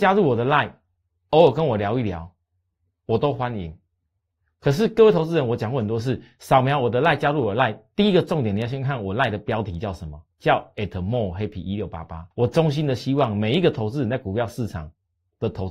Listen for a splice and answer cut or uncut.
cut